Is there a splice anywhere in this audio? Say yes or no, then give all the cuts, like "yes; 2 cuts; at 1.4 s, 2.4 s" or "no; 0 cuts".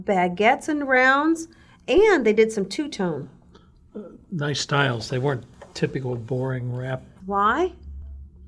yes; 1 cut; at 7.2 s